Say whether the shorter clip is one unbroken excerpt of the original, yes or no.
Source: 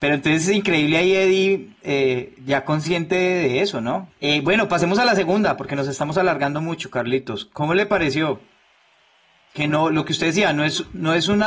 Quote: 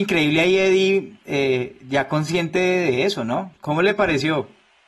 no